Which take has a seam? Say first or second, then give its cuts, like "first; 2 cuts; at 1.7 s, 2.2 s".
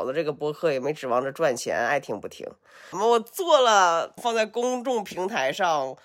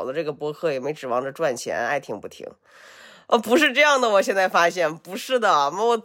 first; 2 cuts; at 2.9 s, 4.2 s